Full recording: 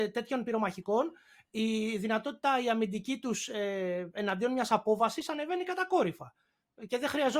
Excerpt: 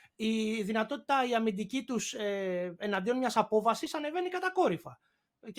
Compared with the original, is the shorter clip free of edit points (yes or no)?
yes